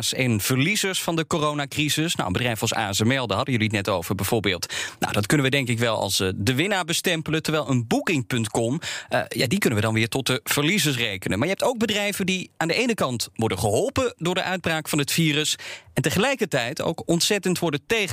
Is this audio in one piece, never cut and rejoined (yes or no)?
yes